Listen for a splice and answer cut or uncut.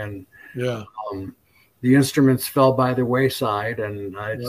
uncut